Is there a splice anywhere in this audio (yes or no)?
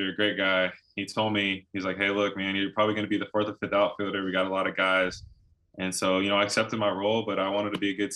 no